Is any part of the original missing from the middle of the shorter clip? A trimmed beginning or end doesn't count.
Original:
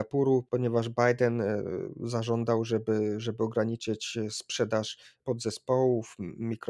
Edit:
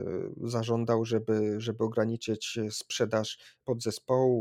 no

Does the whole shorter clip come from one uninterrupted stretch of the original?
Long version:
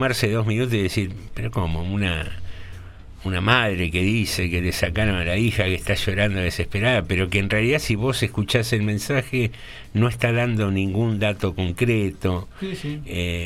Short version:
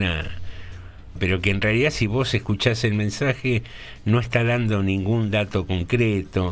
no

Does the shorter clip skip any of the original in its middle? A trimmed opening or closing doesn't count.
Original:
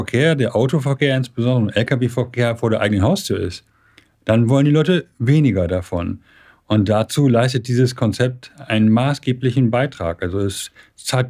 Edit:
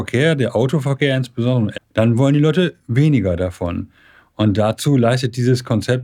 yes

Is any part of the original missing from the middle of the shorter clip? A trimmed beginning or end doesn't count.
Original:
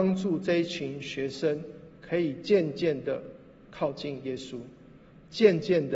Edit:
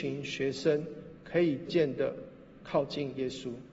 yes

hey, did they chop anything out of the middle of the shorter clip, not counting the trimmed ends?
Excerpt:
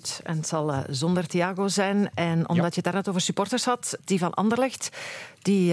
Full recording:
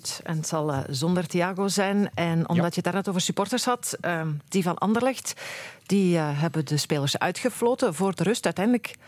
yes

